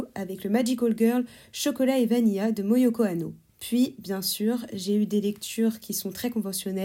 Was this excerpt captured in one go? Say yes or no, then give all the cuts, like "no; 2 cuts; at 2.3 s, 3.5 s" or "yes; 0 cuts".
yes; 0 cuts